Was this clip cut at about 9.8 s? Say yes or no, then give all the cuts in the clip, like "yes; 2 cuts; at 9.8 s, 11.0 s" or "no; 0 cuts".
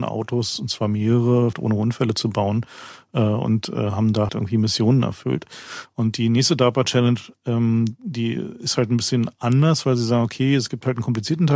no; 2 cuts; at 1.5 s, 4.3 s